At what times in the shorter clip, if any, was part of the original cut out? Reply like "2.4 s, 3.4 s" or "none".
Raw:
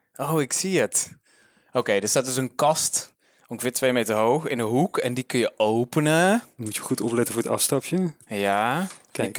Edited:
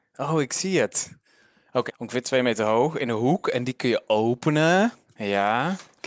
1.9 s, 5.1 s